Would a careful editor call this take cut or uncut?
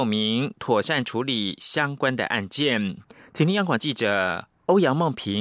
uncut